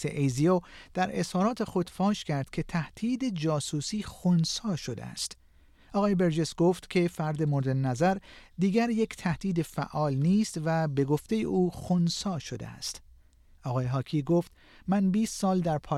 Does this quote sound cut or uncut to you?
cut